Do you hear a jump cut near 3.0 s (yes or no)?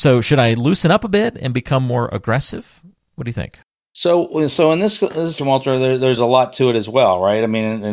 no